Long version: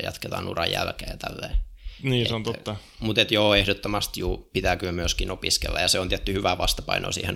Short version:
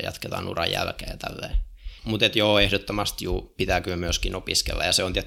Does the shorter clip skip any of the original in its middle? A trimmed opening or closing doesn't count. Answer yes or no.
yes